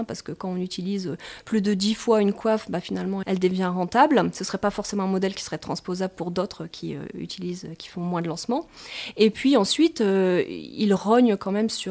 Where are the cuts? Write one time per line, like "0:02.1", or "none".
0:03.2